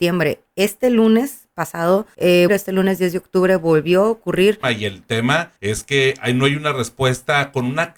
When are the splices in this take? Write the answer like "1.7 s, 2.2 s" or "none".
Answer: 2.5 s, 4.6 s